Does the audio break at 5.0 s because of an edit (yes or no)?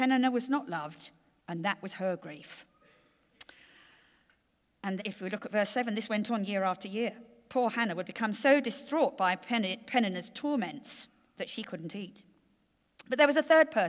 yes